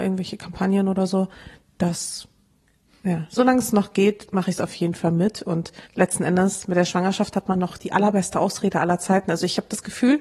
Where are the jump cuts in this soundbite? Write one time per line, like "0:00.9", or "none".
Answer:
0:05.9
0:07.7